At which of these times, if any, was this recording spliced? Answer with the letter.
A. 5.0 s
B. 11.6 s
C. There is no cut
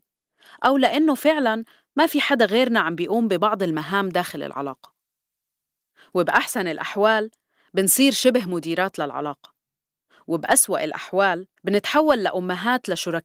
B